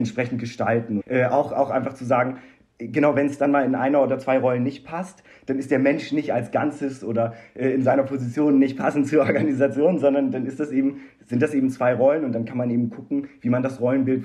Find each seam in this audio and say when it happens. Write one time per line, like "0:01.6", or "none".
0:01.0